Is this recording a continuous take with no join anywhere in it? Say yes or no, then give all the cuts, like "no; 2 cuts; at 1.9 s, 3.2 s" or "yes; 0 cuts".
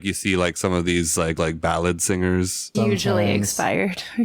no; 2 cuts; at 1.4 s, 2.7 s